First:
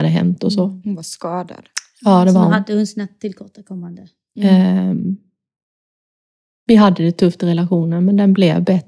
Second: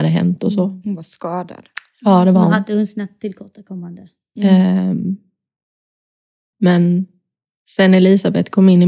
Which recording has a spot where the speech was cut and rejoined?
second; 1 cut; at 6.5 s

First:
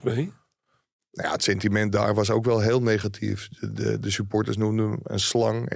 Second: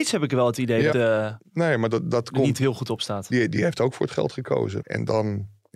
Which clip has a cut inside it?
second; 2 cuts; at 0.9 s, 4.8 s

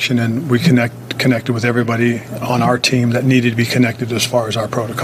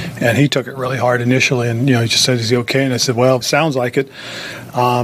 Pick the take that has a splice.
second; 1 cut; at 3.4 s

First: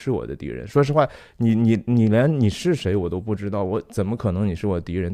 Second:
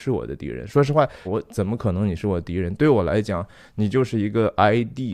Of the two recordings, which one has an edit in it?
second; 1 cut; at 1.2 s

